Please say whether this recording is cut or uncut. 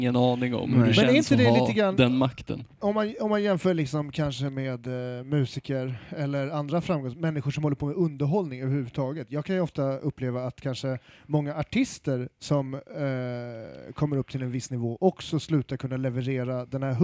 uncut